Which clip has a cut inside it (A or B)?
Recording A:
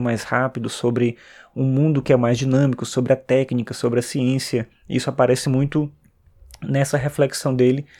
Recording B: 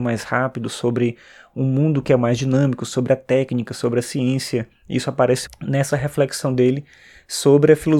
B